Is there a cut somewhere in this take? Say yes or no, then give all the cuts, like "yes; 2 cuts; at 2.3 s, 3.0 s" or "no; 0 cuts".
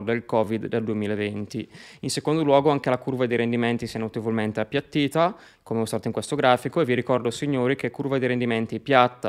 no; 0 cuts